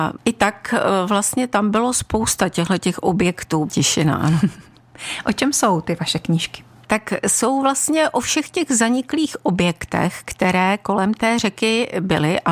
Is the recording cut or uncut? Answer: cut